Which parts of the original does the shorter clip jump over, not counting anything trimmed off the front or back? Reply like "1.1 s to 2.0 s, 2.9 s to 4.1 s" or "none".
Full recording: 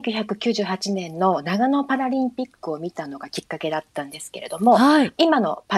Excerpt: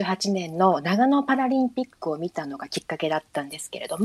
none